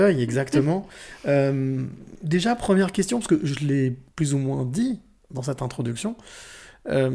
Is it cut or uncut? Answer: cut